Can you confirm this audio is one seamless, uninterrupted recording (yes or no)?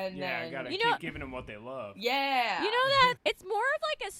no